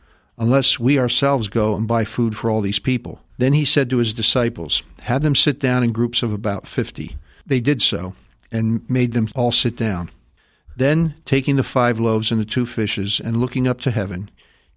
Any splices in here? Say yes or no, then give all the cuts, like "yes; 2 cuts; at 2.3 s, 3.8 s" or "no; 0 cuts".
yes; 1 cut; at 3.3 s